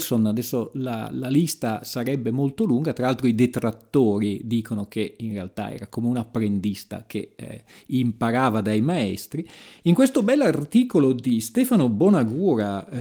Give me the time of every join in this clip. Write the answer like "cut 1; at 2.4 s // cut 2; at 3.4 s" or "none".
none